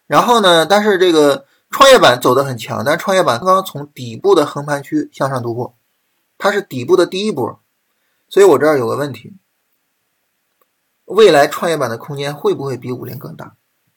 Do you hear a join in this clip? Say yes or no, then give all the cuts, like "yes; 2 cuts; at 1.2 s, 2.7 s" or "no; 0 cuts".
yes; 1 cut; at 3.4 s